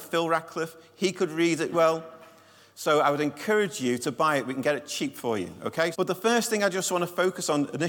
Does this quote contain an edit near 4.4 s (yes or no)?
no